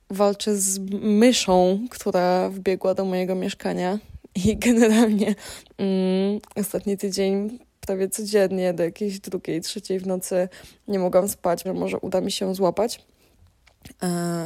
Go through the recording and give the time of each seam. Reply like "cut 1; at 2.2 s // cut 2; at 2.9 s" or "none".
cut 1; at 11.6 s